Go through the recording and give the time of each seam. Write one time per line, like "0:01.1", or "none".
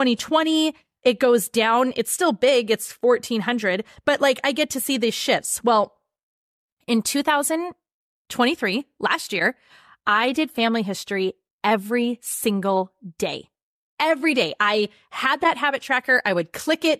none